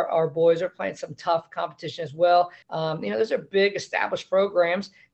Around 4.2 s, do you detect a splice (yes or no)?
no